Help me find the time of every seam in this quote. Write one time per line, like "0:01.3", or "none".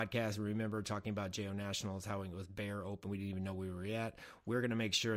none